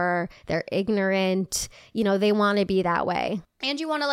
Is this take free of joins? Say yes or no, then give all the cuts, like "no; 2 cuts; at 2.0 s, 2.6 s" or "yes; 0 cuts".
yes; 0 cuts